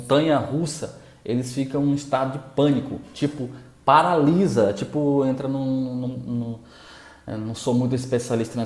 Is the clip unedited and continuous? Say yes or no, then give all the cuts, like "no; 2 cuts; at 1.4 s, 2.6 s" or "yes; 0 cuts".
yes; 0 cuts